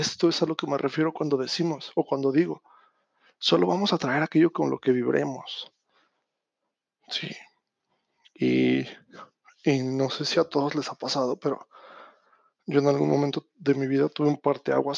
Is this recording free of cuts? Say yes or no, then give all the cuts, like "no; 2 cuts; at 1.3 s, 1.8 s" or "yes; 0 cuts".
yes; 0 cuts